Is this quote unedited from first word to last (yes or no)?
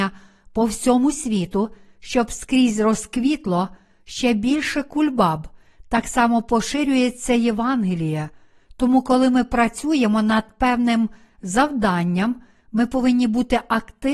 yes